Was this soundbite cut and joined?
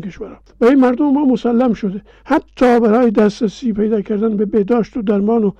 no; 0 cuts

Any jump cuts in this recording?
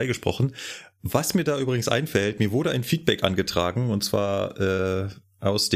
no; 0 cuts

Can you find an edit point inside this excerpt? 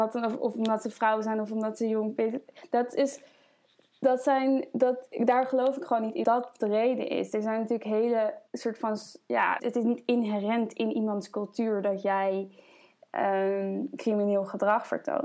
yes; 3 cuts; at 6.2 s, 8.5 s, 9.6 s

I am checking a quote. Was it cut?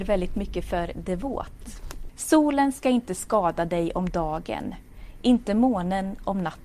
yes; 1 cut; at 2.1 s

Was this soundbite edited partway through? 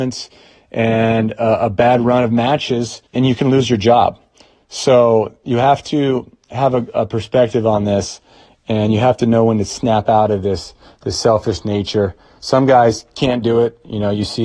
yes; 1 cut; at 3.1 s

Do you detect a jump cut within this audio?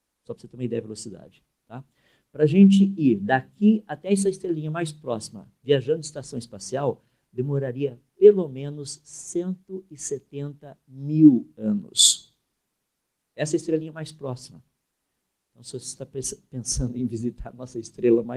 no; 0 cuts

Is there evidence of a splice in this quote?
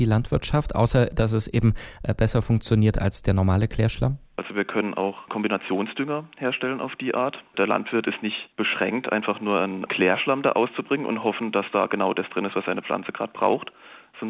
yes; 1 cut; at 4.4 s

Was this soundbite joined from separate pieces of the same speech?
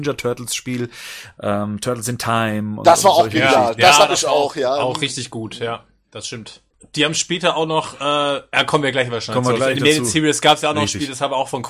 no; 0 cuts

